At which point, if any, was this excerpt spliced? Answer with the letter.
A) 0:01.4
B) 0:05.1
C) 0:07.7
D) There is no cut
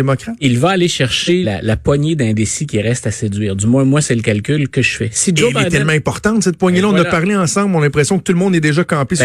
A